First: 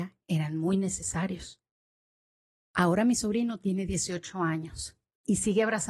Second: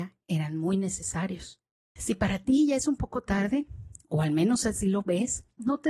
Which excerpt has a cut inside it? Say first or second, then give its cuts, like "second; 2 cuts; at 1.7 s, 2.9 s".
second; 1 cut; at 2.0 s